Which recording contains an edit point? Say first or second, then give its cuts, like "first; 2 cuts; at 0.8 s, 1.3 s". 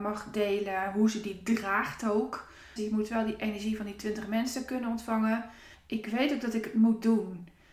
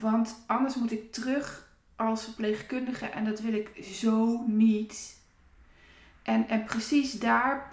first; 2 cuts; at 2.8 s, 5.7 s